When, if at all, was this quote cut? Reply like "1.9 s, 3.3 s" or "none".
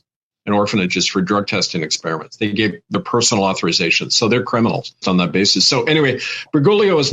5.0 s